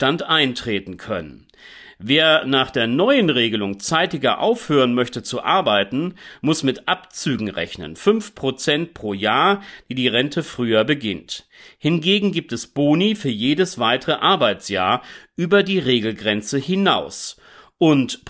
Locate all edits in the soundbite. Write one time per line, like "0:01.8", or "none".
none